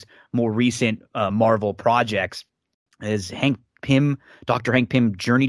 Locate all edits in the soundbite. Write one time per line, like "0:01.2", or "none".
0:01.3